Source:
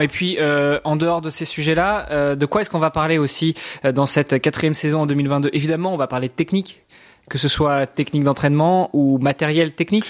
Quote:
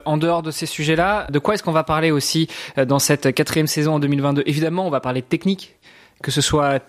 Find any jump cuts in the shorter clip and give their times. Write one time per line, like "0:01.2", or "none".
0:01.3